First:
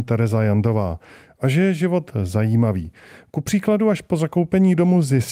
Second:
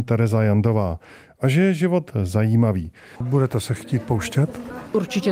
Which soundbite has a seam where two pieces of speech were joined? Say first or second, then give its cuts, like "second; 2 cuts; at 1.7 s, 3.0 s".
second; 1 cut; at 3.2 s